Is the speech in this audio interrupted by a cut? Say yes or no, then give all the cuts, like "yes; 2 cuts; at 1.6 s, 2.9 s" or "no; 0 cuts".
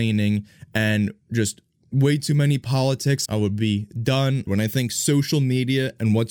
yes; 2 cuts; at 3.3 s, 4.5 s